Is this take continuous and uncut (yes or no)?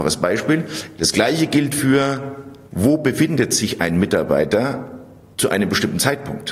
no